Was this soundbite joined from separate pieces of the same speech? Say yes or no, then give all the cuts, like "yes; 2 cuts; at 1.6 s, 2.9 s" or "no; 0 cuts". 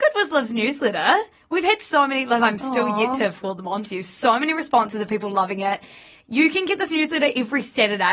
no; 0 cuts